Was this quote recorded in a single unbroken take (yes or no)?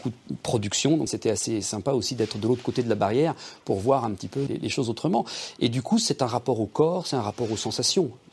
no